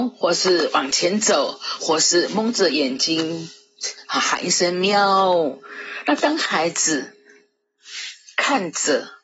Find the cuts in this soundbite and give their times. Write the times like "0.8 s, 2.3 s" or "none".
1.8 s